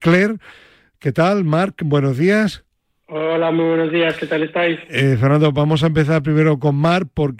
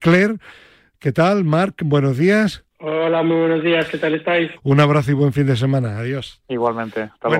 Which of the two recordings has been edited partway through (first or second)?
second